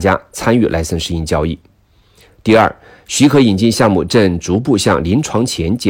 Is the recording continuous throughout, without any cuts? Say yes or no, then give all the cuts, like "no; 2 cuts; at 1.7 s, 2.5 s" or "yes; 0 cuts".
yes; 0 cuts